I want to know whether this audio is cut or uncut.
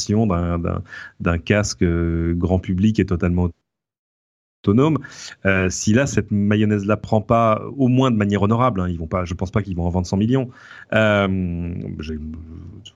uncut